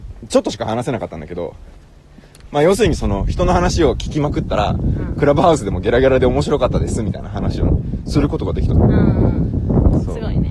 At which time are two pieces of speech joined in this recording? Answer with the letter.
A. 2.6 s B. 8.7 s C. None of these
C